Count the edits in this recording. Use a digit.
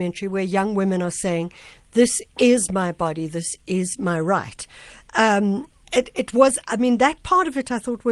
0